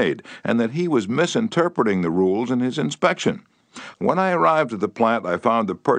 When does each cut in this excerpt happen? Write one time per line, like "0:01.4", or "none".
0:03.9